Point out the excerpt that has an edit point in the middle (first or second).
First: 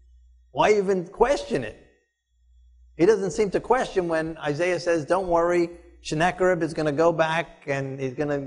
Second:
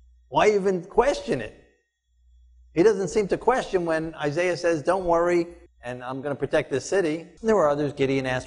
second